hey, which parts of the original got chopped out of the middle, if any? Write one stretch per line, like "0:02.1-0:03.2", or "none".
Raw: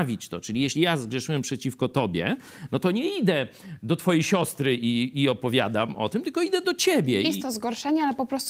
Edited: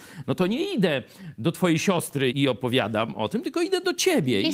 0:04.8-0:05.1